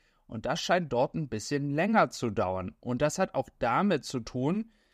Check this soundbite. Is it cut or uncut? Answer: uncut